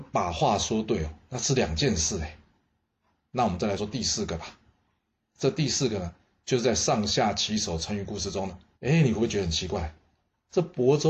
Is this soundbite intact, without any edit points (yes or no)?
no